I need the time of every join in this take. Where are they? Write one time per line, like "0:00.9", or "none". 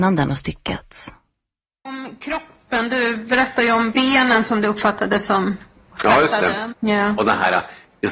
0:06.7